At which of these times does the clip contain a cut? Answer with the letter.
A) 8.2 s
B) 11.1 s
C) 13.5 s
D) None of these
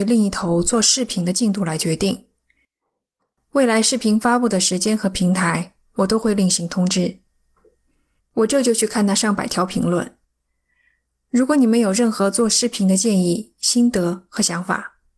A